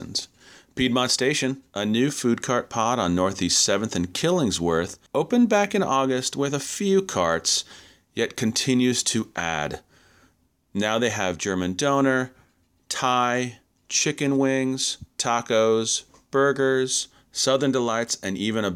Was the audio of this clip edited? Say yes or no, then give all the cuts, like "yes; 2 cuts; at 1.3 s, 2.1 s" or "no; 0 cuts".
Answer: yes; 1 cut; at 5.1 s